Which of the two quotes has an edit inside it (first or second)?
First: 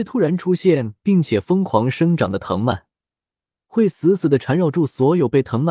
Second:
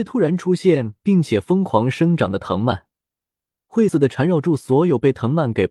second